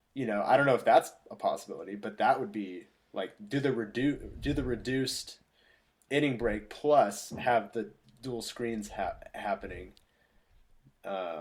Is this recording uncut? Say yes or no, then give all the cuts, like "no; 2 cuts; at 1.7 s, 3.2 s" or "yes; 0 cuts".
yes; 0 cuts